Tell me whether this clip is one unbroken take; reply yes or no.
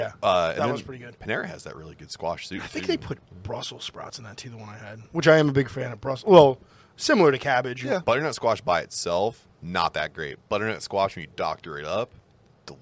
no